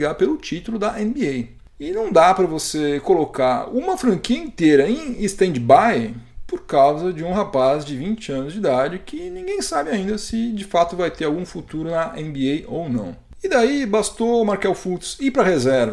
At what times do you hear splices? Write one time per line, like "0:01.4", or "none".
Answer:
none